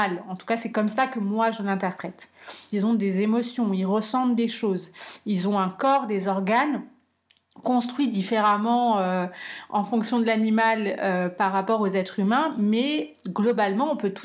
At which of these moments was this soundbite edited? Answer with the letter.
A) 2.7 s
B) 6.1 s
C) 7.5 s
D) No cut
A